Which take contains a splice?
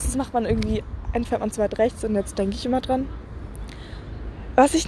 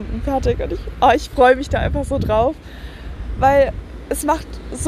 first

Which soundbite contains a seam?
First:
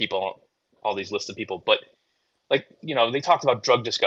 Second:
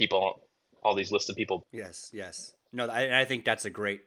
second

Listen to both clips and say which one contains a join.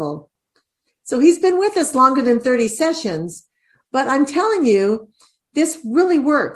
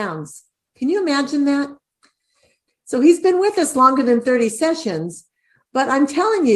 second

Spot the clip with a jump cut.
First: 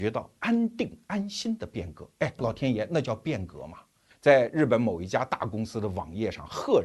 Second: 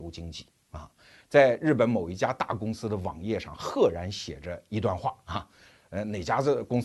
first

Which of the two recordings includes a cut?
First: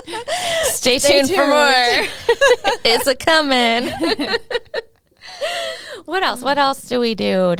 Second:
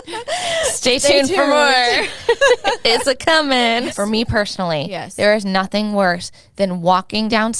second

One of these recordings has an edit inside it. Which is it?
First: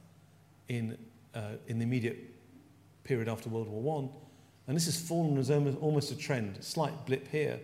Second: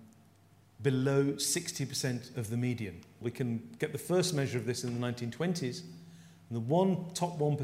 second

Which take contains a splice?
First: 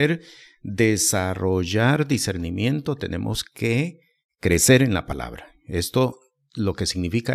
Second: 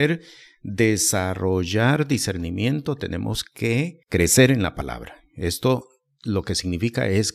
second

